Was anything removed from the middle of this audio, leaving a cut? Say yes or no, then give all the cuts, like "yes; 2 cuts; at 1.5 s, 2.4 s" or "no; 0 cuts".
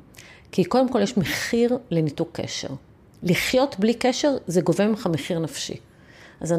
no; 0 cuts